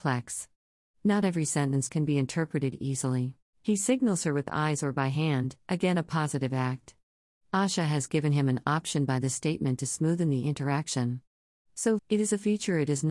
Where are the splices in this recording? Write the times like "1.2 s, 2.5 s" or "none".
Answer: 3.5 s, 12.0 s